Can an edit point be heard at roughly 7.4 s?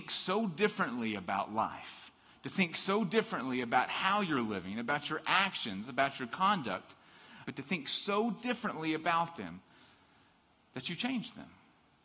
yes; 1 cut; at 7.4 s

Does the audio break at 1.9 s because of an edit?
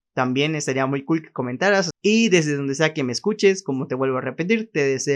yes; 1 cut; at 1.9 s

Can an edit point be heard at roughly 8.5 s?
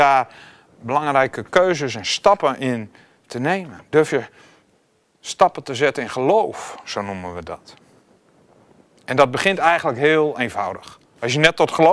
no; 0 cuts

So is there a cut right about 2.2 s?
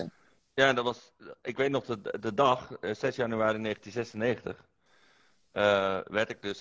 no; 0 cuts

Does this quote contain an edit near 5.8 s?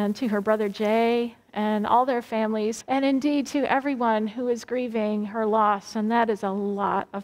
no; 1 cut; at 2.8 s

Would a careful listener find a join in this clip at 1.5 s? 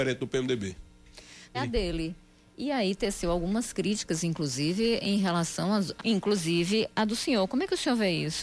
yes; 2 cuts; at 1.5 s, 6.0 s

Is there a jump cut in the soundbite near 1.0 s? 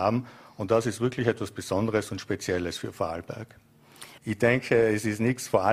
no; 1 cut; at 4.2 s

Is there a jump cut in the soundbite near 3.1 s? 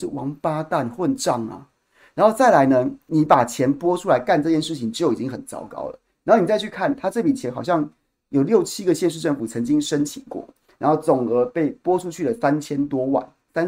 yes; 1 cut; at 3.1 s

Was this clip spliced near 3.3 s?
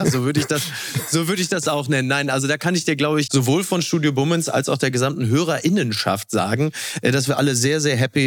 yes; 1 cut; at 3.3 s

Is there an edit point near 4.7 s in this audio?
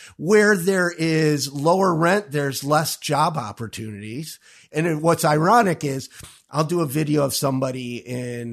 yes; 1 cut; at 4.7 s

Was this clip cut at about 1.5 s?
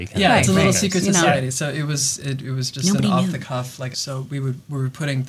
no; 1 cut; at 3.9 s

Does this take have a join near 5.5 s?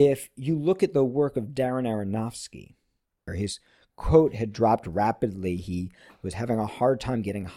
no; 1 cut; at 3.3 s

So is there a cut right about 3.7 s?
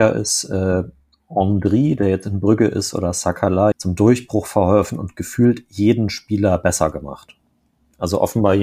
yes; 1 cut; at 3.7 s

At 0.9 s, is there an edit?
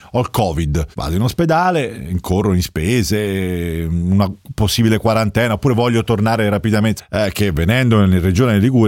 yes; 2 cuts; at 0.9 s, 7.0 s

